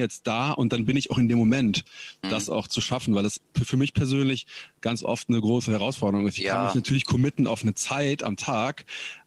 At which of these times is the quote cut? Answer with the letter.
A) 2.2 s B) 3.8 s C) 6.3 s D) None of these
A